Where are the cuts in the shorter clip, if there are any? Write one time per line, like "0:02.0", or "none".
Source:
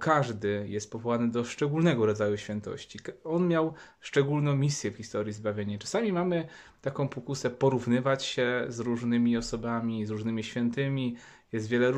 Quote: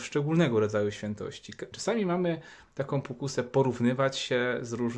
0:01.7